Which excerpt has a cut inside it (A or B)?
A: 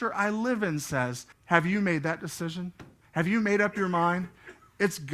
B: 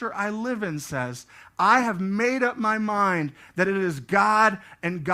A